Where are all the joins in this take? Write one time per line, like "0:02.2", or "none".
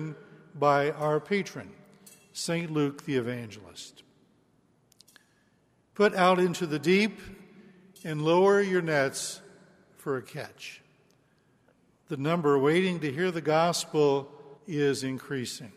0:14.6